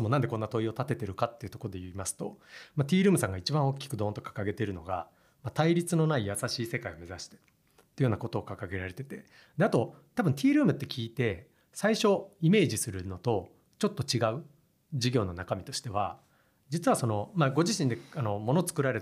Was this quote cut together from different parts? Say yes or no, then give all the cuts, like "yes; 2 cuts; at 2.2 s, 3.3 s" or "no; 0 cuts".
no; 0 cuts